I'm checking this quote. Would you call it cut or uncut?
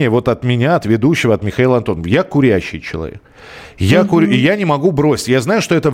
uncut